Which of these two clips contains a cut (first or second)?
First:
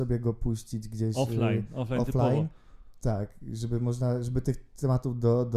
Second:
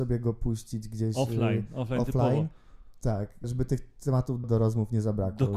second